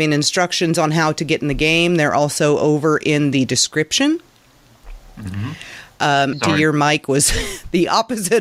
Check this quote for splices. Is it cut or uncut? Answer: cut